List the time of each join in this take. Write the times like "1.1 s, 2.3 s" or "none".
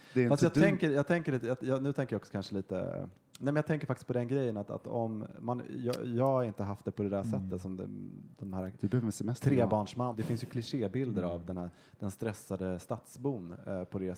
10.1 s